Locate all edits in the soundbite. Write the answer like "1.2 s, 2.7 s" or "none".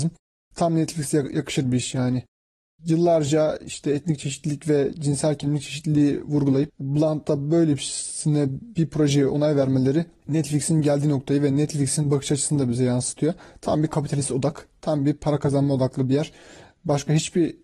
none